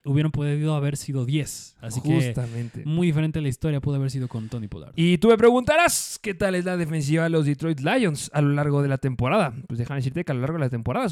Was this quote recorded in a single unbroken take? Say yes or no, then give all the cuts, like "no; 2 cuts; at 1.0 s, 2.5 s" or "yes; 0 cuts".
yes; 0 cuts